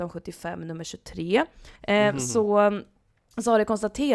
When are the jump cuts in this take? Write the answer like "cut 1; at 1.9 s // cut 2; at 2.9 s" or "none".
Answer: cut 1; at 1.8 s